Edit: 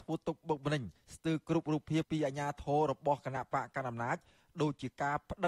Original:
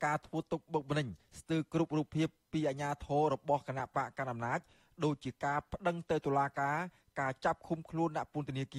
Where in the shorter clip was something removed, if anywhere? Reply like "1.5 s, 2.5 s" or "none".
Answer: 2.0 s